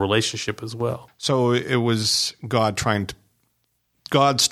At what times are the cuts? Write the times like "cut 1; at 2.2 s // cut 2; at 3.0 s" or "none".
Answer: cut 1; at 1.1 s